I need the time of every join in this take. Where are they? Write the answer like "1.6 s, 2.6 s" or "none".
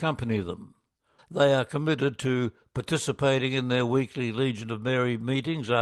1.2 s